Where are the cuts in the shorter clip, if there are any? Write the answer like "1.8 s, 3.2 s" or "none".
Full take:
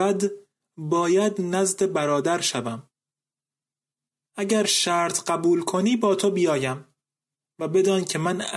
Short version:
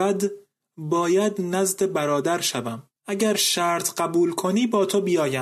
3.0 s